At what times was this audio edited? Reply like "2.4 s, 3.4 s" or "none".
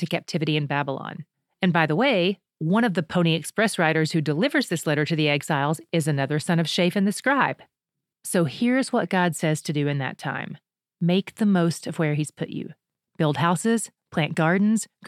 8.1 s